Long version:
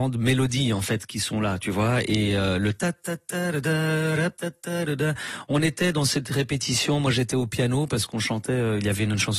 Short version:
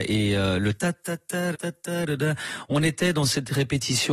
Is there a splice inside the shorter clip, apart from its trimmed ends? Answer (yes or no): yes